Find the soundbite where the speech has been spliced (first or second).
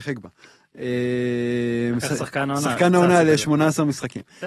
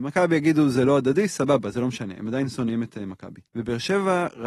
second